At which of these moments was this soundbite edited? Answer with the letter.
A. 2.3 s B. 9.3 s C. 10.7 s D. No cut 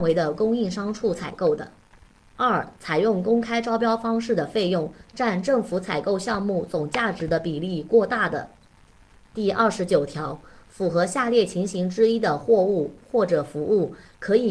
B